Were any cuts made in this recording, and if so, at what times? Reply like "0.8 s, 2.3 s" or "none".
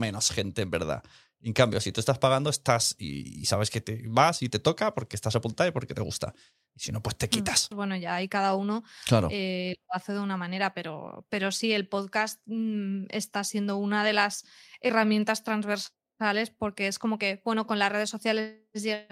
7.7 s